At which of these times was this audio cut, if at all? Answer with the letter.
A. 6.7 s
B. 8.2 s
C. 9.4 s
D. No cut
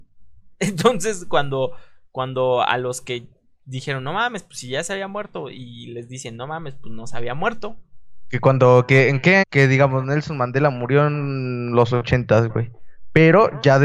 C